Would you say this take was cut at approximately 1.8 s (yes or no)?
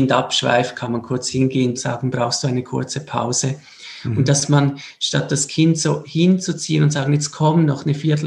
yes